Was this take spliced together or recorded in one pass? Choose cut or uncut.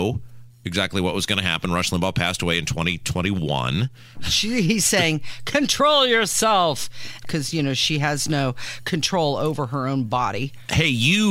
cut